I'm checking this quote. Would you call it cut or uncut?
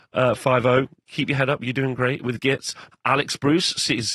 cut